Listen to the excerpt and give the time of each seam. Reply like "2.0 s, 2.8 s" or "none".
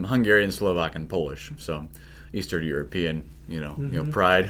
none